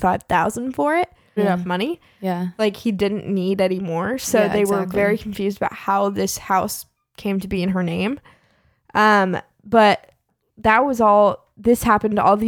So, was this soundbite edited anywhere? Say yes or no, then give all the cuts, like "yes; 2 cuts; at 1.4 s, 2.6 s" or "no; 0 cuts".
yes; 1 cut; at 1.4 s